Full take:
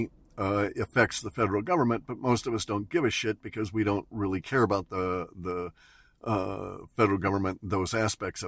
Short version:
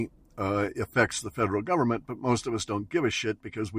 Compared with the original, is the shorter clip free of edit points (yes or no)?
yes